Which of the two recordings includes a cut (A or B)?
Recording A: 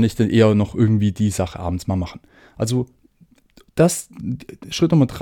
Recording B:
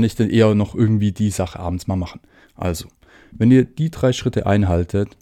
B